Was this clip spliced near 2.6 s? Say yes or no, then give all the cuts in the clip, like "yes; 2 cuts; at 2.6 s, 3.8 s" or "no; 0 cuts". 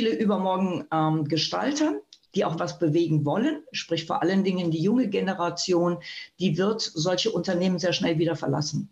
yes; 1 cut; at 2.6 s